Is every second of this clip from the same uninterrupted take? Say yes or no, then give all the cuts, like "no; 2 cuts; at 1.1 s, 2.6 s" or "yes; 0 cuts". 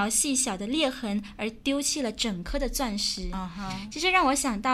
yes; 0 cuts